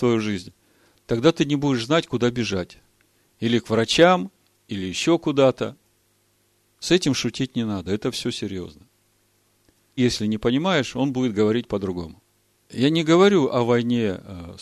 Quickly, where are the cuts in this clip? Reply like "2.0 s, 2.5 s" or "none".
10.0 s, 12.6 s